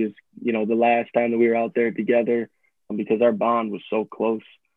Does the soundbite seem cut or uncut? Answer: cut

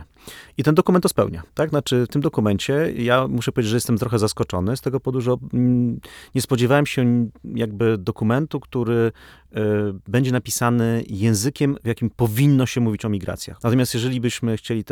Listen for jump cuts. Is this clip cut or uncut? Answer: cut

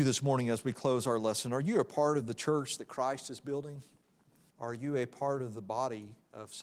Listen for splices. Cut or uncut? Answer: cut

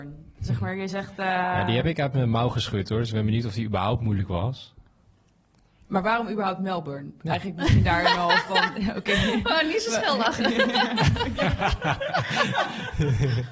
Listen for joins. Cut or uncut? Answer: uncut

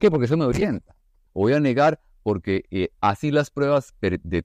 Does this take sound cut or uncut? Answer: cut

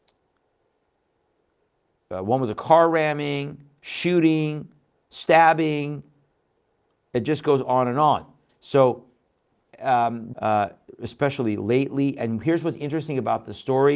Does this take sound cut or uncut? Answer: cut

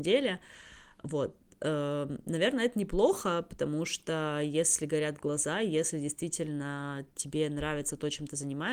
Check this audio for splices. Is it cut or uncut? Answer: uncut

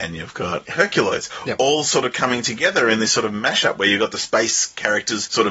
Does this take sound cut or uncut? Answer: uncut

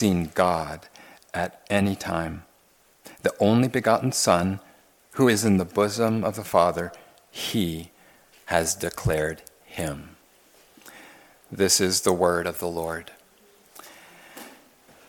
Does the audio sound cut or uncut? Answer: uncut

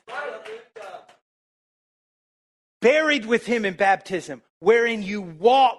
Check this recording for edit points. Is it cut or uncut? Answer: uncut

